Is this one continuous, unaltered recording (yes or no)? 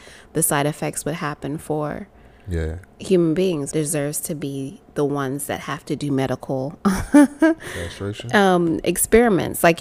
no